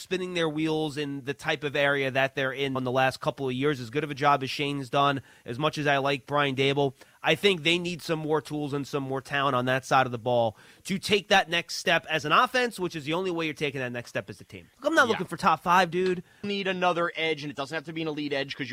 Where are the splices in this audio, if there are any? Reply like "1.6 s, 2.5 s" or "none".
2.8 s, 14.7 s, 16.4 s